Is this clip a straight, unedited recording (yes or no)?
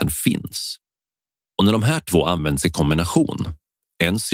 no